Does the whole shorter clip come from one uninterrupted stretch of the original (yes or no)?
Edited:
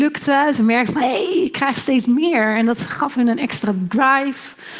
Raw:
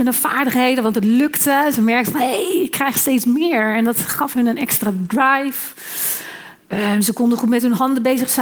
yes